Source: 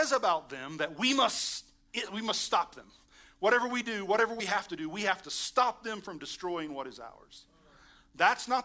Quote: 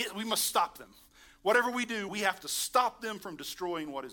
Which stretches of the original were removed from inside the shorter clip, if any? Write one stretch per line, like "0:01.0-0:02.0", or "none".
0:04.1-0:04.9